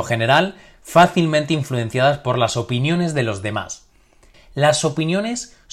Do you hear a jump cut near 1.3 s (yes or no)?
no